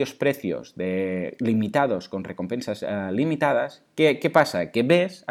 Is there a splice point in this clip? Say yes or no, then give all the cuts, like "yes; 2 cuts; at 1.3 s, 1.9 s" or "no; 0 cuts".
no; 0 cuts